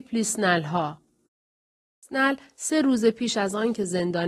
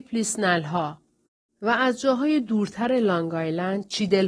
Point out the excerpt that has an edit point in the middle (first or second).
second